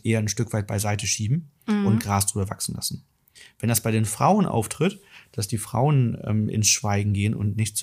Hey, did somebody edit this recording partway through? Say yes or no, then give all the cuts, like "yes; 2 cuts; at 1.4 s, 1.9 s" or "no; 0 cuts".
no; 0 cuts